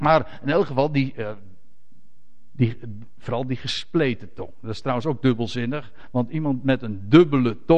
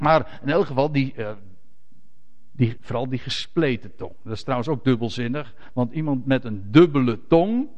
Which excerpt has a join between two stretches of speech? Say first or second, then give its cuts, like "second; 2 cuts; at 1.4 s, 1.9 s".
second; 1 cut; at 2.8 s